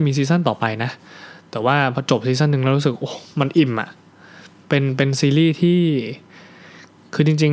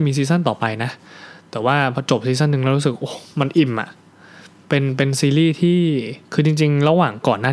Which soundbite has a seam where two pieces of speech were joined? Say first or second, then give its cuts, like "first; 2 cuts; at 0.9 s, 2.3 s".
second; 1 cut; at 6.2 s